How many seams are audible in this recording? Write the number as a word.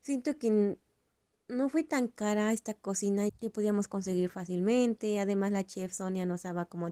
one